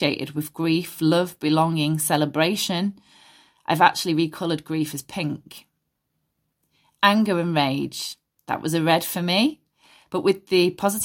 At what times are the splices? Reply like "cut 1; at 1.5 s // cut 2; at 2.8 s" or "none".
none